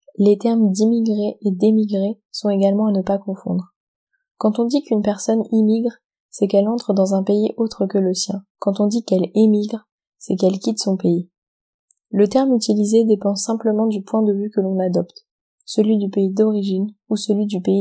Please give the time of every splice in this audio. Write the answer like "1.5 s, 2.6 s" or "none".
8.5 s